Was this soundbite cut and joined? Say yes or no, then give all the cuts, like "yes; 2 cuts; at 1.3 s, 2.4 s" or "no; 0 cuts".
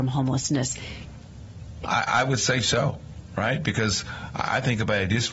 yes; 1 cut; at 1.8 s